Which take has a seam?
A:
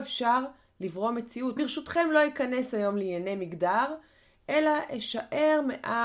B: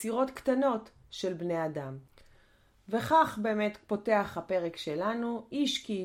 A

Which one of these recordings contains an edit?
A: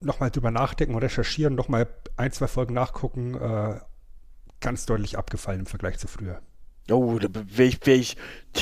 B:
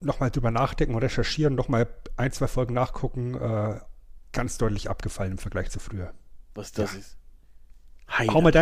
B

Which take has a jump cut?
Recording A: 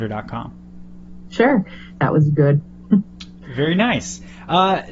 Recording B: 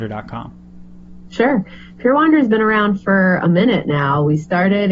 A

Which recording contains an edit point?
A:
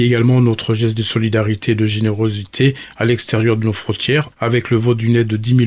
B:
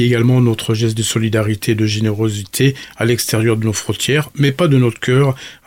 A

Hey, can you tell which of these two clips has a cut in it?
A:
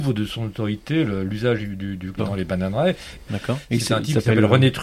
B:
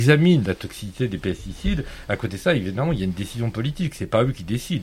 A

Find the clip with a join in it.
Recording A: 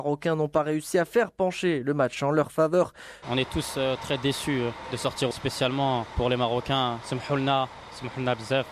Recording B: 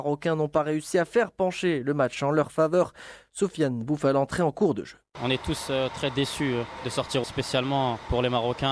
A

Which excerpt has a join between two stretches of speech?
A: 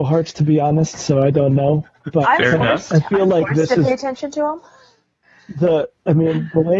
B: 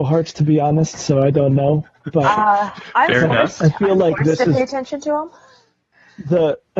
A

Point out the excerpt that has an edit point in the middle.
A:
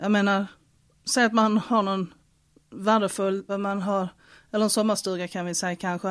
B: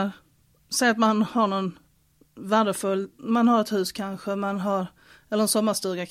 A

